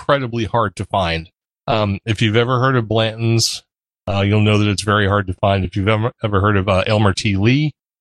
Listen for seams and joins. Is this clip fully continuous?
yes; 0 cuts

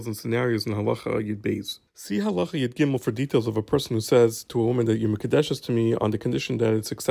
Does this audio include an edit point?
yes; 1 cut; at 1.9 s

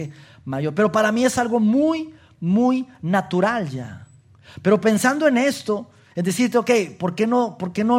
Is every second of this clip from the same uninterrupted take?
yes; 0 cuts

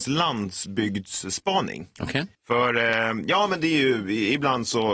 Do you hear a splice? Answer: yes; 1 cut; at 2.3 s

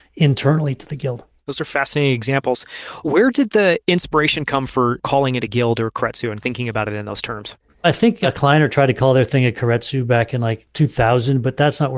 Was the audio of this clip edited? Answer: no; 0 cuts

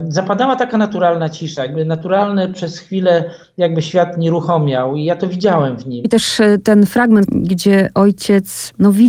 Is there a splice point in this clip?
yes; 2 cuts; at 6.0 s, 7.3 s

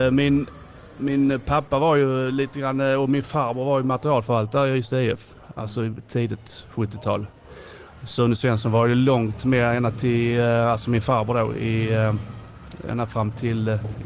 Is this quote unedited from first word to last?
yes; 0 cuts

